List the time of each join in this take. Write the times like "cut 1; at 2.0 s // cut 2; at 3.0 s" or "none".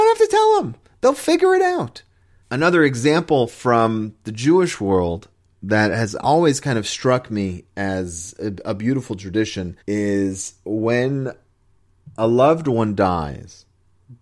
cut 1; at 2.4 s // cut 2; at 9.8 s